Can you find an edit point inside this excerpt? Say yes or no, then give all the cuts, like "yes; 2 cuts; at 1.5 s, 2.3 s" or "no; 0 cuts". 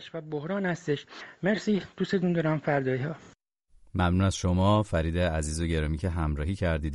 no; 0 cuts